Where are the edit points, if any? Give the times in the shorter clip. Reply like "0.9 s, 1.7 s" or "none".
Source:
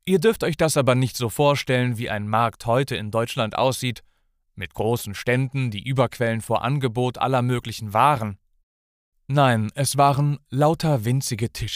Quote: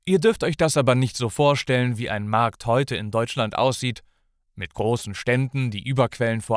none